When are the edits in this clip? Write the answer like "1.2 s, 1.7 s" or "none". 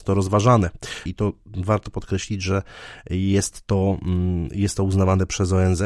1.1 s